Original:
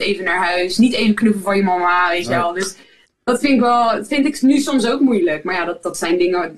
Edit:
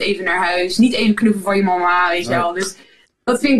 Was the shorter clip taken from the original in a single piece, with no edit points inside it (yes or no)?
yes